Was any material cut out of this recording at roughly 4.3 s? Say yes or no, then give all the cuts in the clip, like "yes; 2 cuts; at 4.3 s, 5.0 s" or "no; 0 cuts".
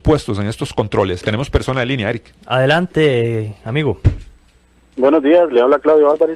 no; 1 cut; at 1.2 s